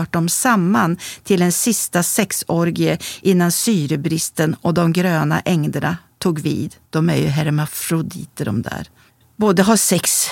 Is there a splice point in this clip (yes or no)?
yes